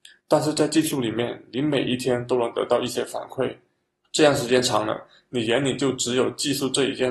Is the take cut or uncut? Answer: uncut